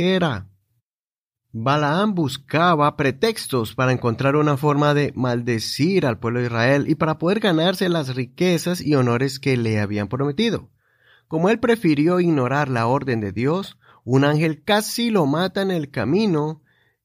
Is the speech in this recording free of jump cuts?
yes; 0 cuts

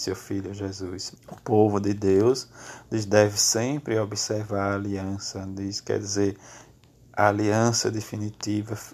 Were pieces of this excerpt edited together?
yes; 1 cut; at 1.2 s

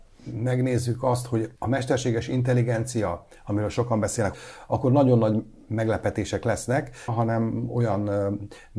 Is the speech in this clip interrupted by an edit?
yes; 3 cuts; at 1.6 s, 4.3 s, 7.1 s

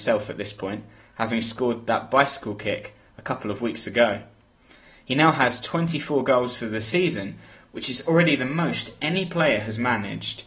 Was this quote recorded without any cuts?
yes; 0 cuts

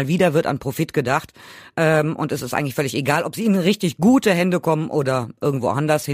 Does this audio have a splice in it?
no; 0 cuts

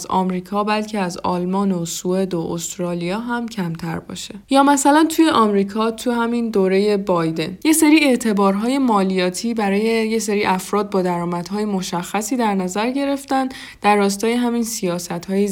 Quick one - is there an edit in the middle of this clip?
yes; 1 cut; at 4.4 s

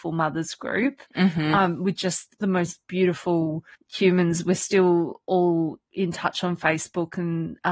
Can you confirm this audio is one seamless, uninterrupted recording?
no; 1 cut; at 3.7 s

